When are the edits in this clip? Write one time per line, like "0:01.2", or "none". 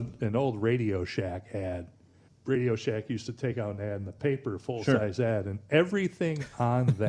none